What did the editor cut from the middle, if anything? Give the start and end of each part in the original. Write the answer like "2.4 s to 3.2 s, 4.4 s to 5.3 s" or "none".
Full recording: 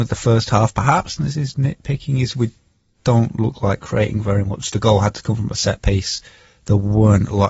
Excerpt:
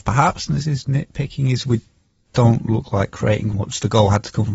4.2 s to 4.4 s